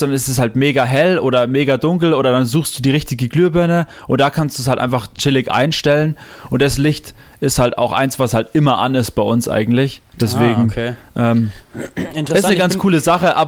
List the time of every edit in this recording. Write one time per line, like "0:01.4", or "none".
none